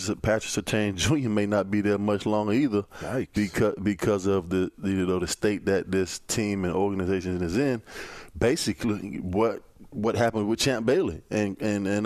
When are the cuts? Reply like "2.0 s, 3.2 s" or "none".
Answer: none